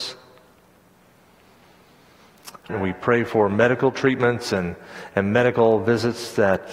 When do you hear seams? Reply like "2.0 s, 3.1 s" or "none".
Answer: 2.7 s

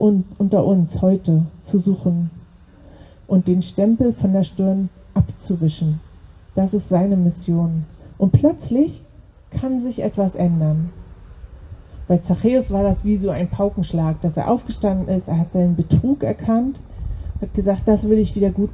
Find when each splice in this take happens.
none

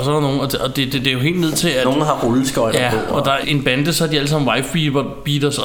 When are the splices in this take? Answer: 3.4 s

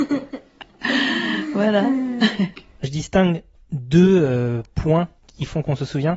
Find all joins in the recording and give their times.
5.2 s

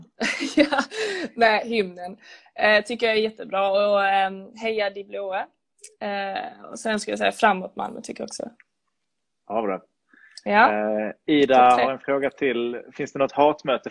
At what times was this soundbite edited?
none

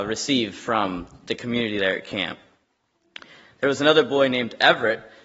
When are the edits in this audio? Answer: none

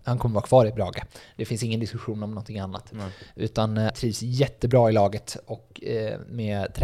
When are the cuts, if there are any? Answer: 3.9 s

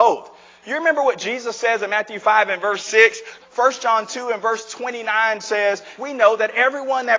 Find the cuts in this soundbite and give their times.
3.4 s, 6.0 s

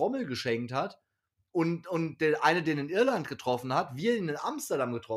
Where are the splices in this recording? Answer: none

